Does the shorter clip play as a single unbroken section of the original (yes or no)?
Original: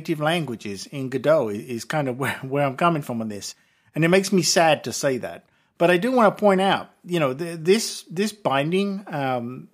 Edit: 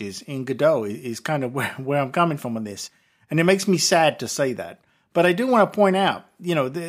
yes